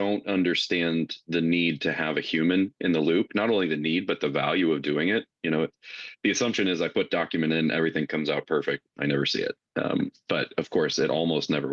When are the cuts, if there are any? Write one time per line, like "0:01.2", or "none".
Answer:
none